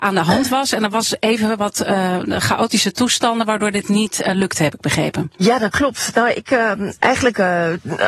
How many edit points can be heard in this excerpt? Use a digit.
2